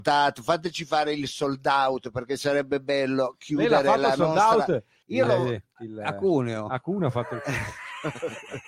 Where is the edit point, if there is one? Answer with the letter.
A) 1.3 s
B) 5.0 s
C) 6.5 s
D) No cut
B